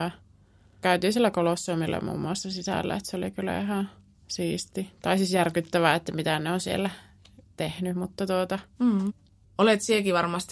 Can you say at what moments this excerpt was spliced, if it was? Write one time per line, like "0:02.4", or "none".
0:09.4